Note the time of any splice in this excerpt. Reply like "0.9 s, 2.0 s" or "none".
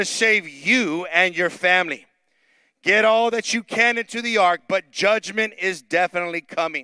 none